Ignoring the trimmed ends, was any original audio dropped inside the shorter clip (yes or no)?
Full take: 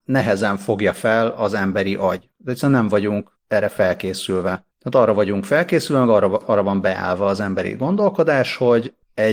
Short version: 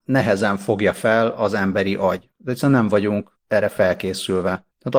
no